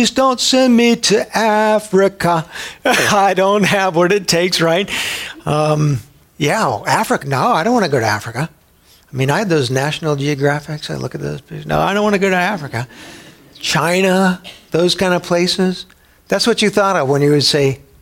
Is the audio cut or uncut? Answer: cut